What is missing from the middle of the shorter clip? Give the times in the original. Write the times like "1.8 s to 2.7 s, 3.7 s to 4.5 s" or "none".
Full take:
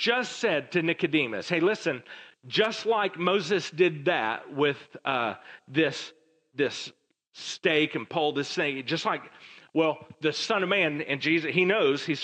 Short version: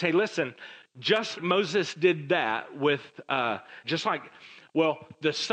2.8 s to 3.1 s, 5.6 s to 8.8 s